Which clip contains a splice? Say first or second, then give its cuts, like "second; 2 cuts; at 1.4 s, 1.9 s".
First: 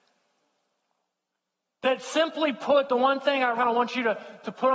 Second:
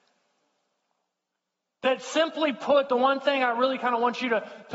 first; 1 cut; at 3.5 s